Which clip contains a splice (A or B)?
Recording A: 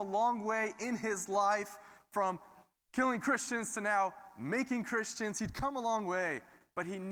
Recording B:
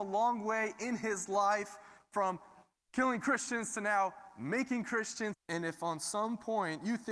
B